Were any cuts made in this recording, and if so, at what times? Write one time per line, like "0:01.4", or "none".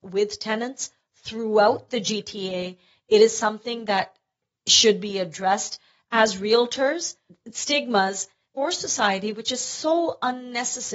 0:07.3